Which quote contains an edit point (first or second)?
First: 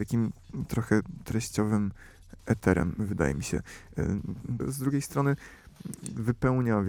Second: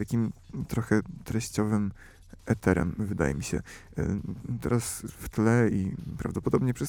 first